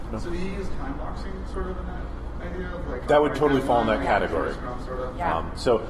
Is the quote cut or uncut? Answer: uncut